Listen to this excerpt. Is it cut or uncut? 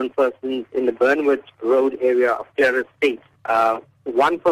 uncut